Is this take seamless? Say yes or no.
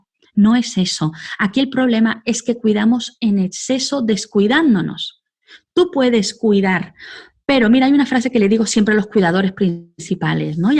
yes